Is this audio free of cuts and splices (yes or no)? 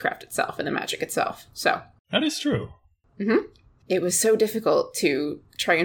yes